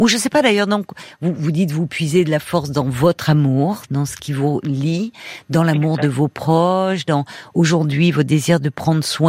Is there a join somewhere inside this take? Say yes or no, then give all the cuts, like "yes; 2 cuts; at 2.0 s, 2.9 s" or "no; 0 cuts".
no; 0 cuts